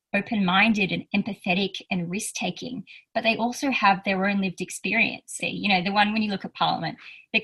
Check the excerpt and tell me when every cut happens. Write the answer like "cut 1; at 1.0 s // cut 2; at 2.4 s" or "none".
cut 1; at 5.4 s